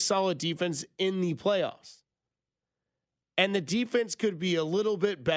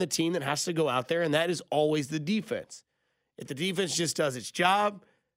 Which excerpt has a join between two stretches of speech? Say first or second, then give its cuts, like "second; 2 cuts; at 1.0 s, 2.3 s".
first; 1 cut; at 3.2 s